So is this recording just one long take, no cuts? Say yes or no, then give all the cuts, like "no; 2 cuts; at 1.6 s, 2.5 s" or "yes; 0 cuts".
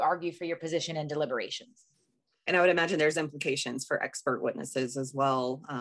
no; 1 cut; at 2.5 s